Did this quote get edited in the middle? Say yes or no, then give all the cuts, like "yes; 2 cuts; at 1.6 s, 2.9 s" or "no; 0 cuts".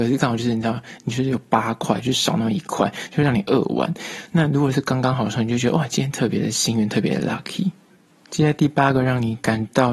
no; 0 cuts